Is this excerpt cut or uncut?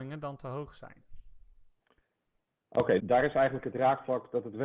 cut